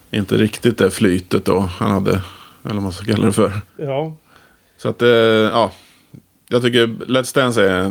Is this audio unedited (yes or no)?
no